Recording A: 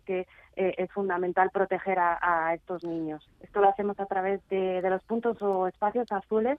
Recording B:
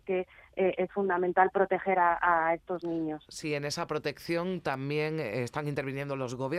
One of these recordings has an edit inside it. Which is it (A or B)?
A